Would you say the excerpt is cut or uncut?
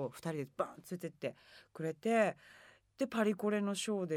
uncut